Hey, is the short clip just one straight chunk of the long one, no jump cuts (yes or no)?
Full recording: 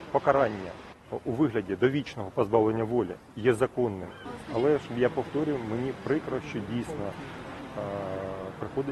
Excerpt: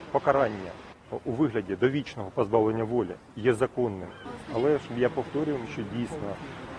no